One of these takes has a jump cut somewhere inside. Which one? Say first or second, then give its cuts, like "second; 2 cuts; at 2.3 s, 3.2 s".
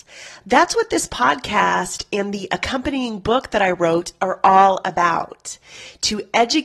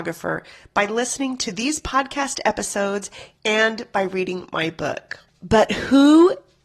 second; 1 cut; at 5.3 s